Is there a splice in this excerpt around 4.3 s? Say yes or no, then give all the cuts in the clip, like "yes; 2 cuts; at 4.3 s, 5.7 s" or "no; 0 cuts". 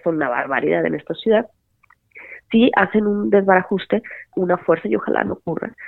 yes; 2 cuts; at 2.4 s, 4.3 s